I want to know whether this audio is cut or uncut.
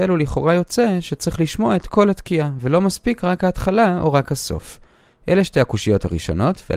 uncut